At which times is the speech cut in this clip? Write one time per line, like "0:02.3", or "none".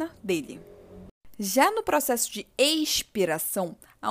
none